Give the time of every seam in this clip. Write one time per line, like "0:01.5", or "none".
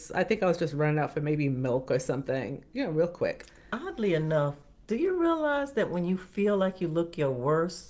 none

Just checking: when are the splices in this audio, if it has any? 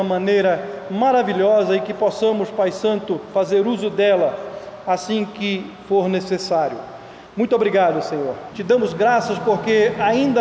0:07.3
0:08.5

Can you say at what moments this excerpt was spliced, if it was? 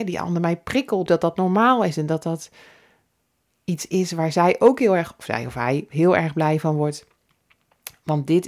0:01.1

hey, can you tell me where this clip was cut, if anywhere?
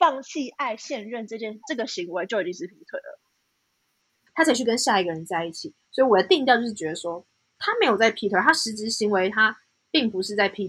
0:04.3
0:07.6

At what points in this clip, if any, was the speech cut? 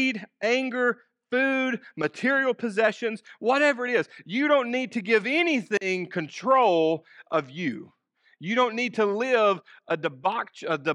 none

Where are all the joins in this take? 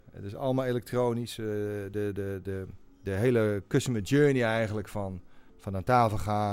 0:05.5

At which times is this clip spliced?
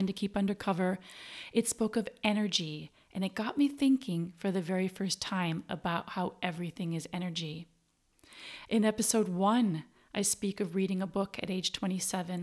0:08.6

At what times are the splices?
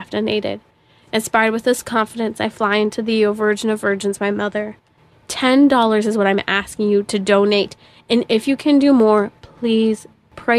0:05.1

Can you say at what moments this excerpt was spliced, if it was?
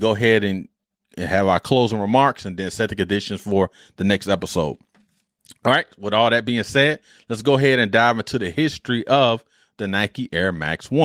none

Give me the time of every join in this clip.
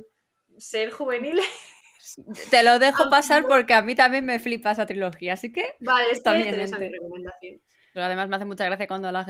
0:06.5
0:08.0

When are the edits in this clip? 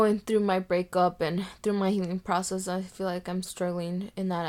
0:03.4

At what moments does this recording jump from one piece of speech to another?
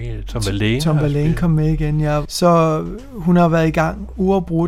0:02.2

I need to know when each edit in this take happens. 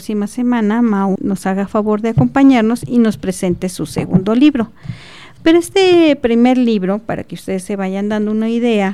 0:01.2

